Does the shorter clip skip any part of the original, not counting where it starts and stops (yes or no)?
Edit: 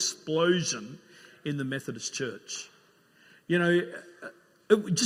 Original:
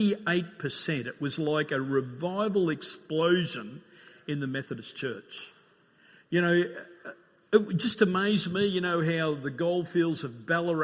no